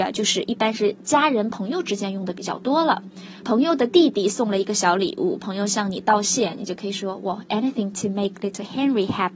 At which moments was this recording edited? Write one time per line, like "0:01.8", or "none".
0:03.4